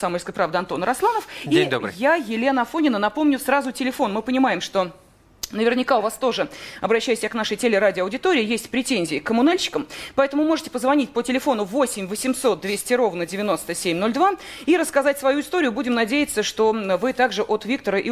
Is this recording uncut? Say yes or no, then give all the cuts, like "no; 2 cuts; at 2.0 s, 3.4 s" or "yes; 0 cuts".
yes; 0 cuts